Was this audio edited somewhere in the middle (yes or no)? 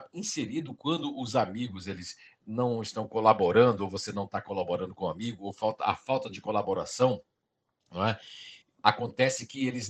no